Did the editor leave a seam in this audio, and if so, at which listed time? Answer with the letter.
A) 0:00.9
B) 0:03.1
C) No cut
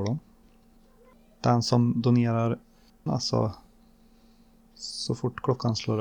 B